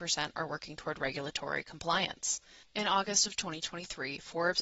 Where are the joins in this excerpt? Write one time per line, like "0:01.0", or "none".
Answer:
0:02.6